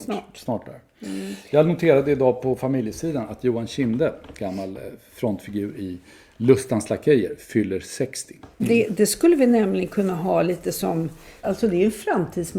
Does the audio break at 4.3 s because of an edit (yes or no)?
no